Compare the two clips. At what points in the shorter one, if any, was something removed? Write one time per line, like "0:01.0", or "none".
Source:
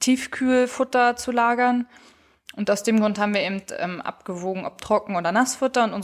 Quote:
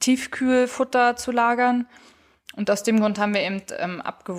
none

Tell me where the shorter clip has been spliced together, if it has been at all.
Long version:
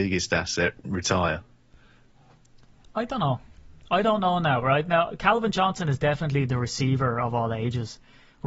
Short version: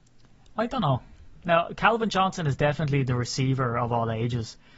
0:01.4

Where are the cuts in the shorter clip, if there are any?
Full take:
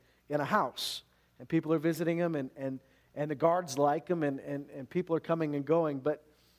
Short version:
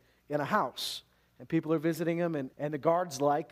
0:02.5

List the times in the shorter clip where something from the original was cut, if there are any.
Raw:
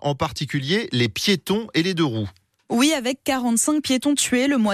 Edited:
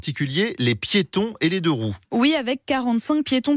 0:02.0

